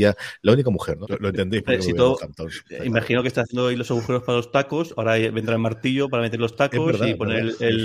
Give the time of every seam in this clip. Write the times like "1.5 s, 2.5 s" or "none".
1.0 s